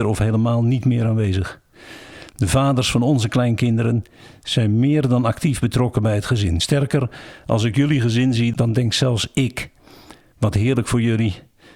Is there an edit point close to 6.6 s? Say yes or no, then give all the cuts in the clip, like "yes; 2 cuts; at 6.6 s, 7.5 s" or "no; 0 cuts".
no; 0 cuts